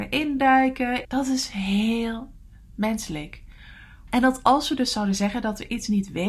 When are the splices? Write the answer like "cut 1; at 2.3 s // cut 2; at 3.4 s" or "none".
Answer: cut 1; at 1.0 s // cut 2; at 4.1 s